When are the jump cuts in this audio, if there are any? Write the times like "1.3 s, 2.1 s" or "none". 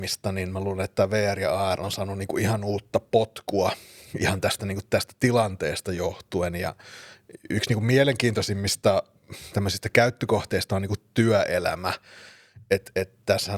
none